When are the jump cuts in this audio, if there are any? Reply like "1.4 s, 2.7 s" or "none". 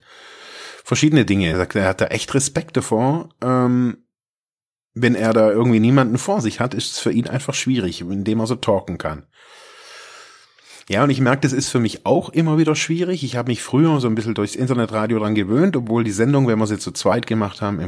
1.5 s